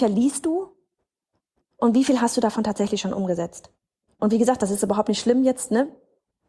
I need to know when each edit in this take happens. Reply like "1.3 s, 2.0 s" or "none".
1.6 s